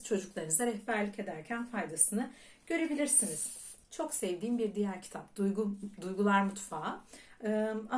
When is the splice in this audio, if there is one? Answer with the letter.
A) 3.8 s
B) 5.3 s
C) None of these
A